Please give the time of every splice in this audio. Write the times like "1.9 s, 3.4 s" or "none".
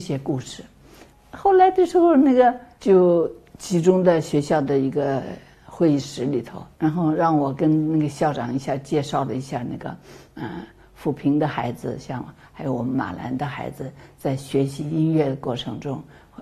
2.8 s, 6.7 s